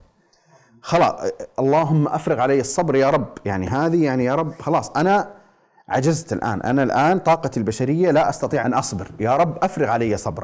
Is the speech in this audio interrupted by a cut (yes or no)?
yes